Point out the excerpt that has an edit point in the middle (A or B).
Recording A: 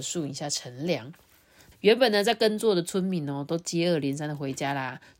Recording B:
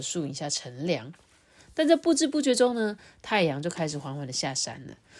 A